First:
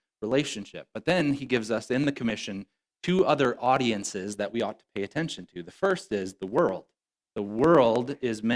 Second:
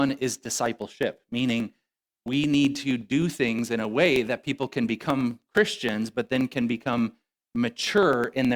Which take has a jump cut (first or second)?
first